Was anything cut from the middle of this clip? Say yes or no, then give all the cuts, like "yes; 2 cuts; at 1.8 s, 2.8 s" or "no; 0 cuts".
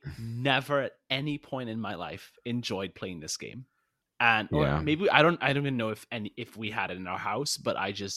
yes; 1 cut; at 4.0 s